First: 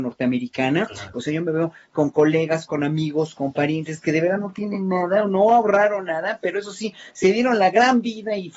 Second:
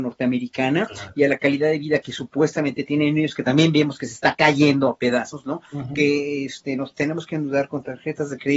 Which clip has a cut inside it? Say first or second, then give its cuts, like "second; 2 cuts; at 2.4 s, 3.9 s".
first; 1 cut; at 1.1 s